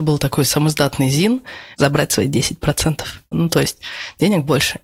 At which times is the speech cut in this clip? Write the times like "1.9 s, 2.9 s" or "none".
1.7 s, 3.3 s